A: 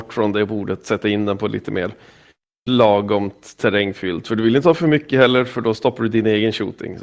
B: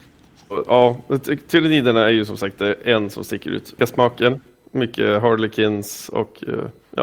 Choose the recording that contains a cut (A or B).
B